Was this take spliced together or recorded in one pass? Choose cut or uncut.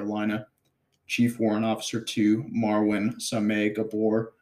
uncut